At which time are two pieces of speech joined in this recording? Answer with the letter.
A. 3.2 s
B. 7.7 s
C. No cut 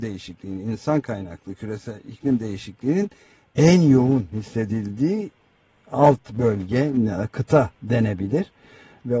B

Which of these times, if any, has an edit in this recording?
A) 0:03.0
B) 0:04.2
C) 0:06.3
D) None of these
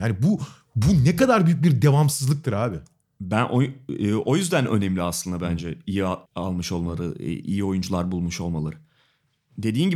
C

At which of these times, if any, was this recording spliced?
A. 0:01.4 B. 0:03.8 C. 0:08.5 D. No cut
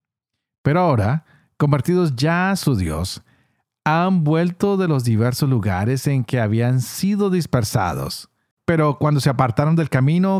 C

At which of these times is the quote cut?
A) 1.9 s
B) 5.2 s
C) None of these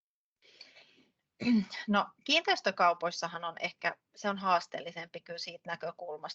C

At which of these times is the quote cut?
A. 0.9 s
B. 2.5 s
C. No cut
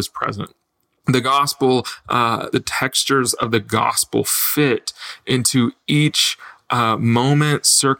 B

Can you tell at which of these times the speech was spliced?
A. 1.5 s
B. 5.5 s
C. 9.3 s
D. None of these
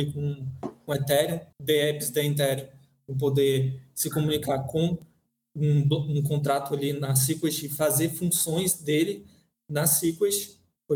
A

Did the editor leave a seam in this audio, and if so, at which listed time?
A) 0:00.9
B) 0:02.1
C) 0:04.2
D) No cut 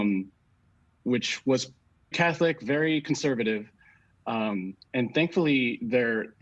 B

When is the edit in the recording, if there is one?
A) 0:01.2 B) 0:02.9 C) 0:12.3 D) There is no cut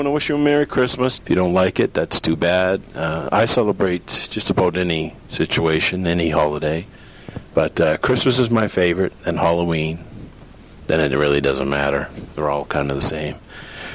A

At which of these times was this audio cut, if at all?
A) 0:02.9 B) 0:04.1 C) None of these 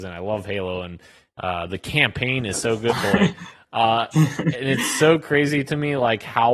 A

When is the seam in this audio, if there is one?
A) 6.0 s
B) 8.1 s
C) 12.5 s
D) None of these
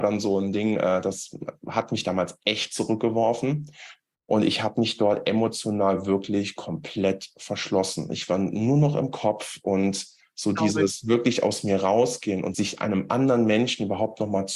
C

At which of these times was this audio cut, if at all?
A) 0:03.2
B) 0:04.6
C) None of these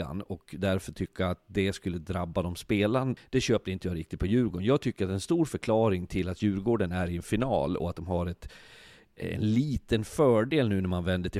A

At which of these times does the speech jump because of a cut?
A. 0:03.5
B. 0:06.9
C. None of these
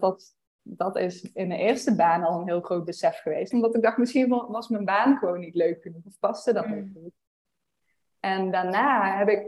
A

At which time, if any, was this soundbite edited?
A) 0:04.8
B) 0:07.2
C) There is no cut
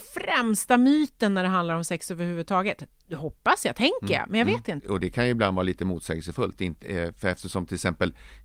A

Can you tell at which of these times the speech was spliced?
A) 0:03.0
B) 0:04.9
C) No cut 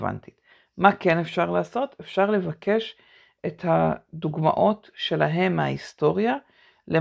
C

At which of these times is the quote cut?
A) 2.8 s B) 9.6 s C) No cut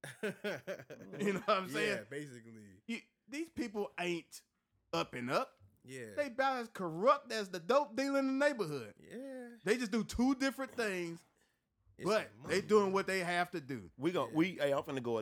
C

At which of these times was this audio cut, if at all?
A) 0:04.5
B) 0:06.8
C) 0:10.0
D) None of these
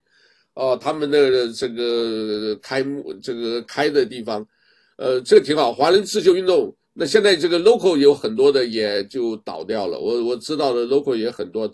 D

